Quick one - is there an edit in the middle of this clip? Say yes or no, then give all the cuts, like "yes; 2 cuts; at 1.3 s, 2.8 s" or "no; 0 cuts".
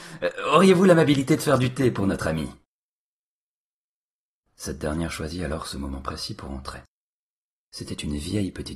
no; 0 cuts